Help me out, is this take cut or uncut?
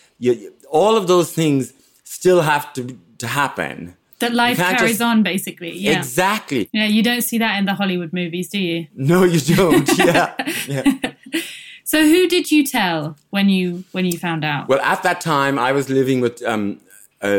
uncut